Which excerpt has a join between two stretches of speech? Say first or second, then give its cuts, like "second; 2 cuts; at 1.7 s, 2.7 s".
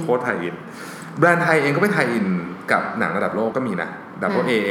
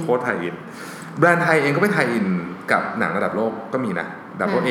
first; 1 cut; at 3.5 s